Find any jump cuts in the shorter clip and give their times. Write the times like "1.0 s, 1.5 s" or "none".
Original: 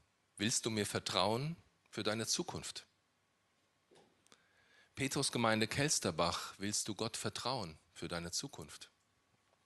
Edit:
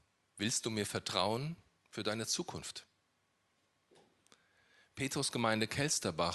none